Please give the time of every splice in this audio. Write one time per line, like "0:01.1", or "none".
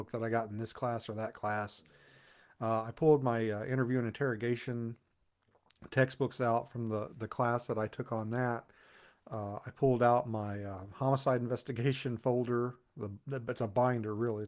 none